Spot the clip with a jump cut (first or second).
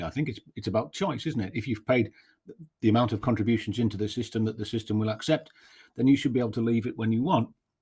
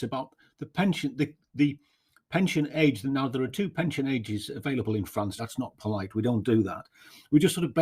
second